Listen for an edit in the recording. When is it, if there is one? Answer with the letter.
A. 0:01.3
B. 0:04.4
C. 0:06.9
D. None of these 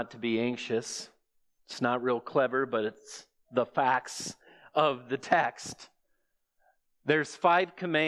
D